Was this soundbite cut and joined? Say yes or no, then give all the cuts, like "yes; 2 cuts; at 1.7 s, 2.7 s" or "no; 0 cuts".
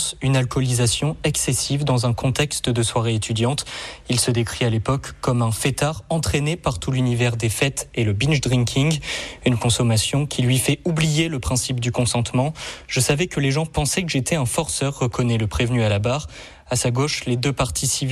no; 0 cuts